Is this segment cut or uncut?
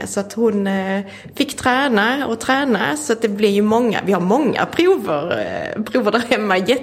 uncut